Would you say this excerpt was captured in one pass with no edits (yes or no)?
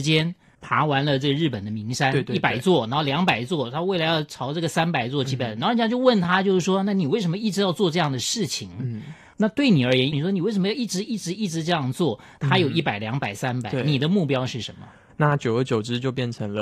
no